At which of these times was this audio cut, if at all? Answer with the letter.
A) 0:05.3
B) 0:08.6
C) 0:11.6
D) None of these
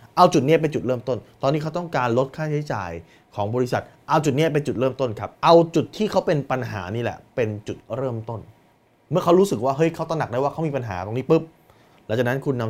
A